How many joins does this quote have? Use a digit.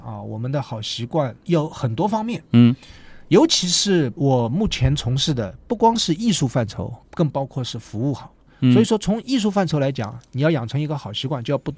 0